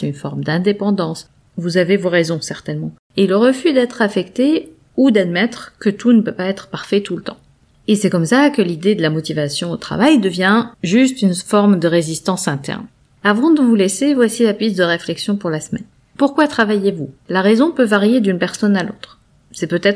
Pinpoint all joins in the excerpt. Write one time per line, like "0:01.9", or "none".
0:10.7
0:17.2